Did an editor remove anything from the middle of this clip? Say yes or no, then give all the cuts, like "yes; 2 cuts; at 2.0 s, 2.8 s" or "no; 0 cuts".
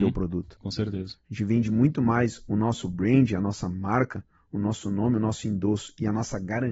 no; 0 cuts